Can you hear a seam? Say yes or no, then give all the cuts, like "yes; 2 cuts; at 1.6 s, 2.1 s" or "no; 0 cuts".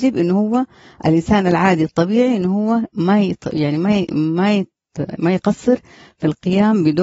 no; 0 cuts